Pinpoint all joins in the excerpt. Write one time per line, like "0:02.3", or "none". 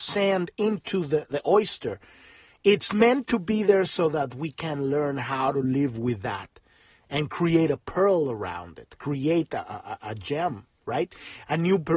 none